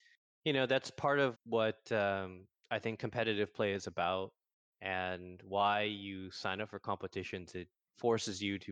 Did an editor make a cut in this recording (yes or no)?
yes